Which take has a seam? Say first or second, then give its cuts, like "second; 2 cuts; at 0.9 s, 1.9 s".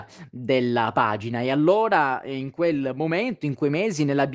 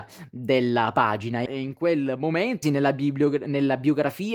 second; 2 cuts; at 1.5 s, 2.6 s